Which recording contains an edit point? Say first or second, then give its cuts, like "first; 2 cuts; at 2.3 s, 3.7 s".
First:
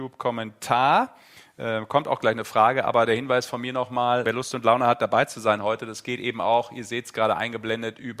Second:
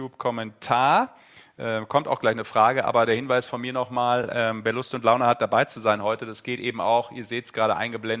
first; 1 cut; at 4.2 s